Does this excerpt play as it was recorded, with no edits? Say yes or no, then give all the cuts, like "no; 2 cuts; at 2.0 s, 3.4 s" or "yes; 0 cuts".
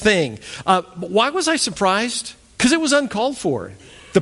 yes; 0 cuts